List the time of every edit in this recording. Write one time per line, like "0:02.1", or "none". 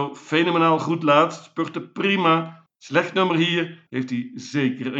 0:02.7
0:03.9